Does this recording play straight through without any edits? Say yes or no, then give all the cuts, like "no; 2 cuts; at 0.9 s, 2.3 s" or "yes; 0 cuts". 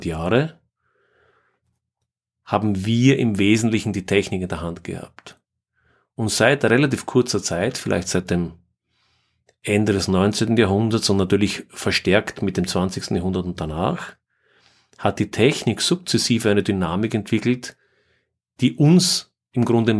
yes; 0 cuts